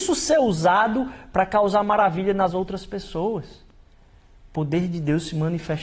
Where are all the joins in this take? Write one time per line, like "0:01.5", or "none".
none